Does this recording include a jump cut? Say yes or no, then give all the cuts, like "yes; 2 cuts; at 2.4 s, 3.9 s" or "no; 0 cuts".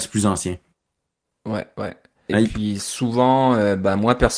yes; 1 cut; at 2.3 s